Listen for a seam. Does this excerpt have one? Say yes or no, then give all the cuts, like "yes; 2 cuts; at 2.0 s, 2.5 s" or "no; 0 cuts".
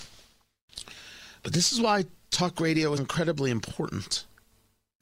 yes; 1 cut; at 3.0 s